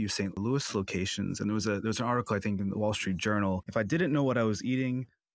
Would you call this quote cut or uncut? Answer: cut